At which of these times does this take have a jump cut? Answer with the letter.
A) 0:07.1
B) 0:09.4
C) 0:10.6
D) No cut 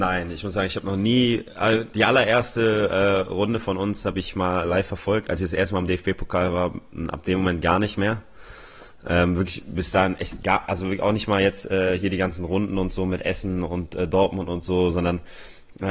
D